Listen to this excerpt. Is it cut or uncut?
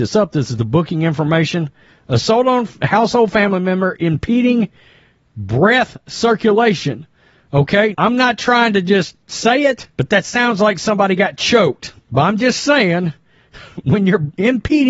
cut